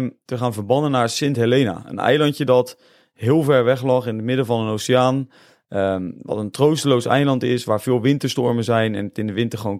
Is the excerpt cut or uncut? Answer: uncut